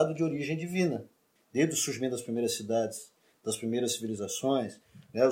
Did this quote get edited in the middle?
yes; 1 cut; at 1.4 s

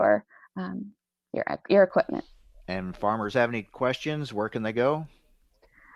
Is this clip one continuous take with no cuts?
yes; 0 cuts

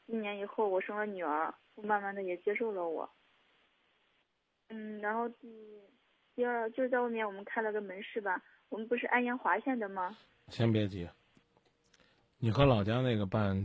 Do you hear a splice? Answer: yes; 1 cut; at 1.6 s

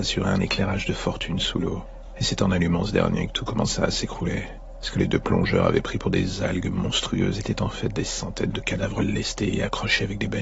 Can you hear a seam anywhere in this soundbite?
no; 0 cuts

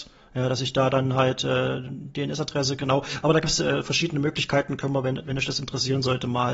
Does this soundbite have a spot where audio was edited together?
no; 0 cuts

